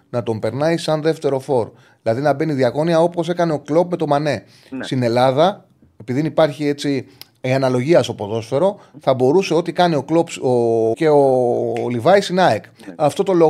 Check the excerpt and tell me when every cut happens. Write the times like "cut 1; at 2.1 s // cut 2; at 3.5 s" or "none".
cut 1; at 10.9 s